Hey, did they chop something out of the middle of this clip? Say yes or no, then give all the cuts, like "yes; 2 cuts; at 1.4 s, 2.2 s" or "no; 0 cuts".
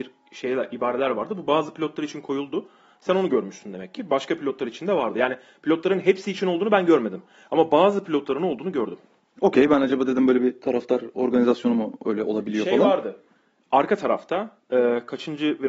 no; 0 cuts